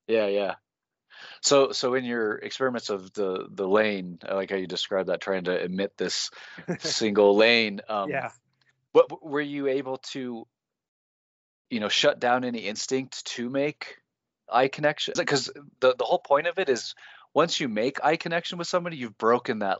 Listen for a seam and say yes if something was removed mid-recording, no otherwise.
yes